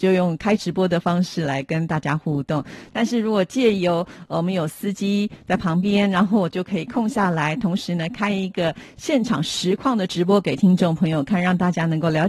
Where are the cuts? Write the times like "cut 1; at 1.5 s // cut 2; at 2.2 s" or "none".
cut 1; at 2.9 s